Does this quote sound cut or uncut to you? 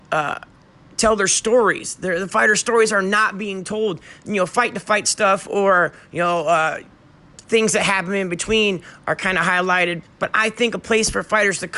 cut